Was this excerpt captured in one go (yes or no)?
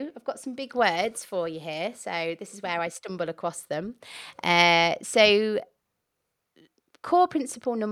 yes